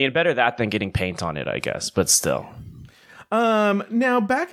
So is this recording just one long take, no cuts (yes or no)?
yes